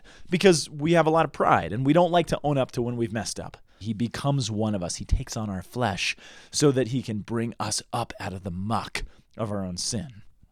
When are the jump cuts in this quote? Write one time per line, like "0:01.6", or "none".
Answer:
0:03.8